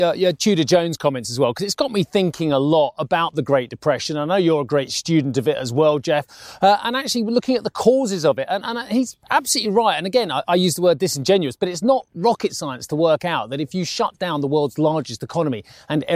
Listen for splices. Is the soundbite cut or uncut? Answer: uncut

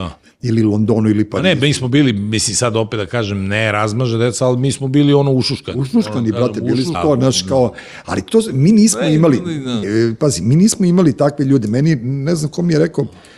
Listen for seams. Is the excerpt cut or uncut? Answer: cut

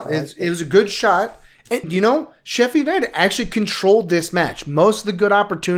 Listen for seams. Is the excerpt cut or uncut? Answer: cut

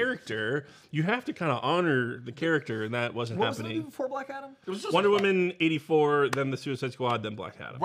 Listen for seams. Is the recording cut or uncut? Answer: uncut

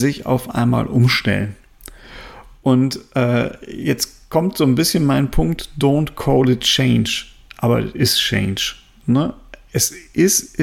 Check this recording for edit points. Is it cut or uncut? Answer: uncut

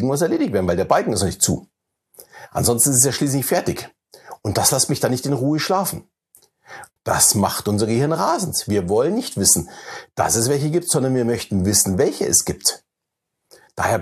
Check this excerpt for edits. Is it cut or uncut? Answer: cut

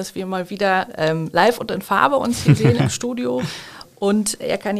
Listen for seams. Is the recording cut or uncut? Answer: uncut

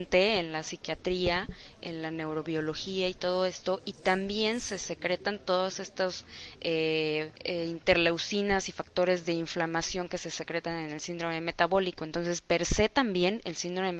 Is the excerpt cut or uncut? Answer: cut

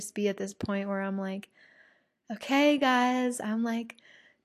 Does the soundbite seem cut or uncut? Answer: uncut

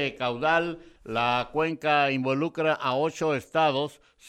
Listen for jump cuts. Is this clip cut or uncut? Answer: cut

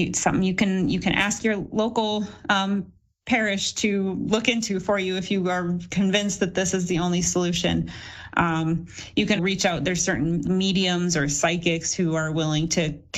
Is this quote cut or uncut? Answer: cut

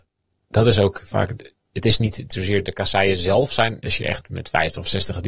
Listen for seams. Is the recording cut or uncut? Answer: cut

